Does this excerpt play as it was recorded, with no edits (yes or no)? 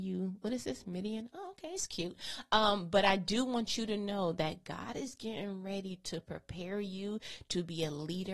yes